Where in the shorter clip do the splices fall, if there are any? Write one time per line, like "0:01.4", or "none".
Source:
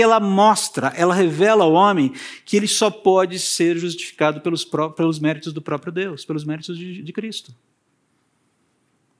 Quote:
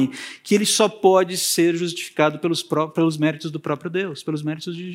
none